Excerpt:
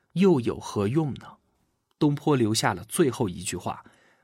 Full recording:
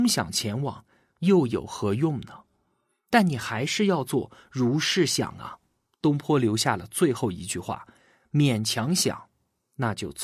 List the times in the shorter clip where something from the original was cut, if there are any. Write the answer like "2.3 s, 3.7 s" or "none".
1.5 s